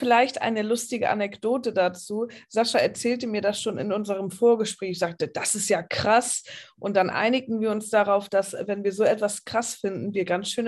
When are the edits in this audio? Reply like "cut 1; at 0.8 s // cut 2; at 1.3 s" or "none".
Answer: none